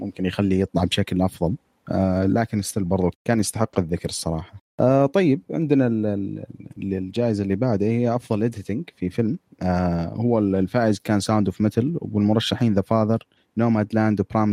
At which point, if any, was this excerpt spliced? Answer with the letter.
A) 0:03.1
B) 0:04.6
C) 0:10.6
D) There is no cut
A